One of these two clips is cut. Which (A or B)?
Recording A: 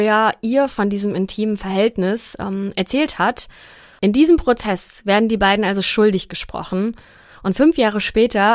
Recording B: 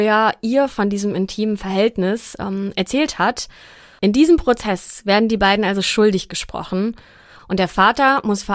B